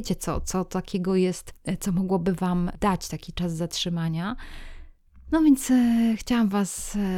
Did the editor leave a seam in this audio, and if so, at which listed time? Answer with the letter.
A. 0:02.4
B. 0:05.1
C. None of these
C